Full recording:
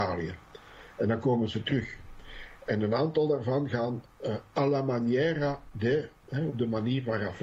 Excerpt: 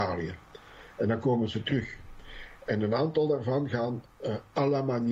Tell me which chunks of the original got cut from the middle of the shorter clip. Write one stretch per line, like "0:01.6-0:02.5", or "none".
none